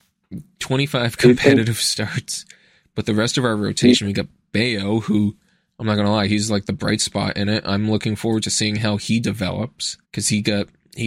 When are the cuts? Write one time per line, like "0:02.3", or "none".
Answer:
0:10.0